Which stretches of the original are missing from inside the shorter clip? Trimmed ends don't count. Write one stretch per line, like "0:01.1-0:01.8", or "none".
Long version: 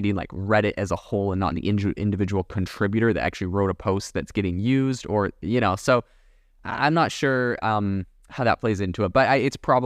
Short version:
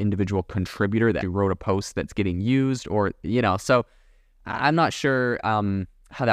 0:03.2-0:03.4